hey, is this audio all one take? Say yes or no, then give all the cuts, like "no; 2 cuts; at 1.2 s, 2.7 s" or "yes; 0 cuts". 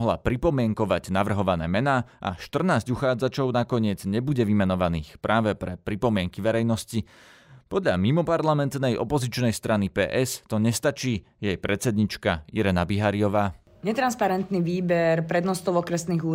yes; 0 cuts